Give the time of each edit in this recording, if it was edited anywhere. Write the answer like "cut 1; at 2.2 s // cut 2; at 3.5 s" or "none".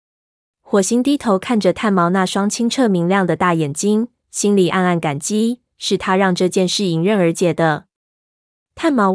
none